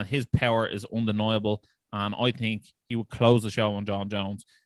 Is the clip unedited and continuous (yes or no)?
yes